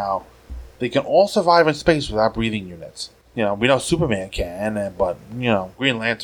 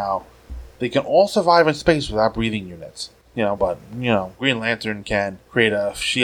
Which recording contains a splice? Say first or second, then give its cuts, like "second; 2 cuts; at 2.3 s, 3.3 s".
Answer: second; 1 cut; at 3.5 s